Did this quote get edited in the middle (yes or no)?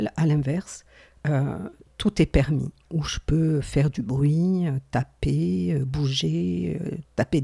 no